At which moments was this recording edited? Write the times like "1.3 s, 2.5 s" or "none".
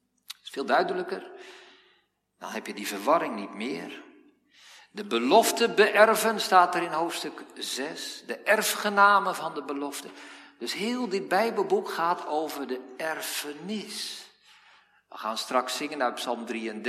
none